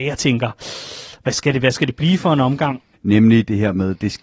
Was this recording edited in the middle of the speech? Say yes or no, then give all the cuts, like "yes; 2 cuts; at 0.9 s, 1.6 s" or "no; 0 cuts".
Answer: yes; 1 cut; at 2.9 s